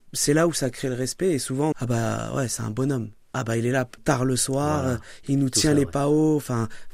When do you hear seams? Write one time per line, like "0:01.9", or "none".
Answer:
0:01.7
0:04.0

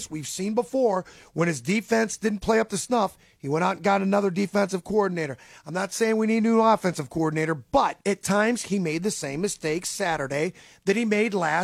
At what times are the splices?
0:08.0

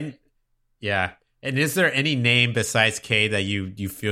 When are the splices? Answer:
none

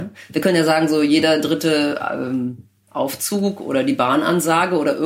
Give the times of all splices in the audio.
none

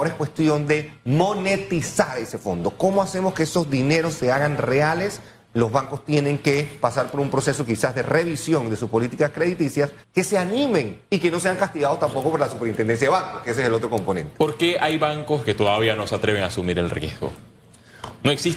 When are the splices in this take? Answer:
0:10.0

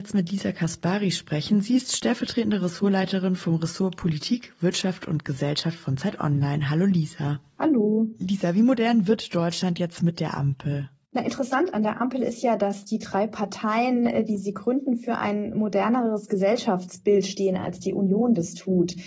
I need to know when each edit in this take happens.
none

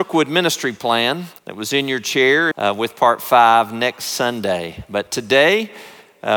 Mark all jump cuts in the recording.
0:01.4
0:02.5

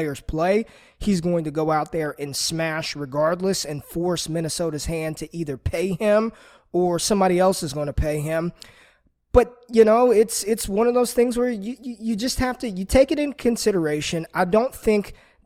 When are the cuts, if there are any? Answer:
none

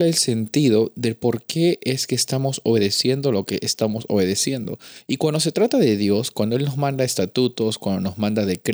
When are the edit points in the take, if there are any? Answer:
none

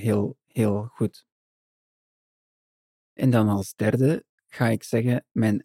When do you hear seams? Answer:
none

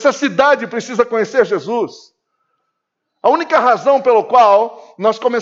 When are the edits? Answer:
none

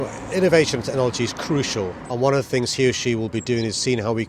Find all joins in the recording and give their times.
0:02.1

